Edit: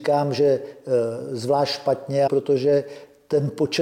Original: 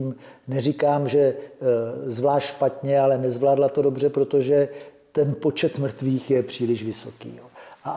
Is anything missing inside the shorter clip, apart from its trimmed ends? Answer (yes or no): yes